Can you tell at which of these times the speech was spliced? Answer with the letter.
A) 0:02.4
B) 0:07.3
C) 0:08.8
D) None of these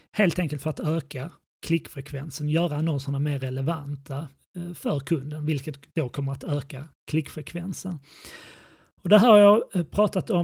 D